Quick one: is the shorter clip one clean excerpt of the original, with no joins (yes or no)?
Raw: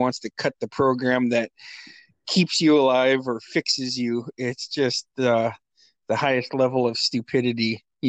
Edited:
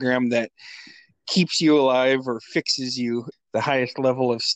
no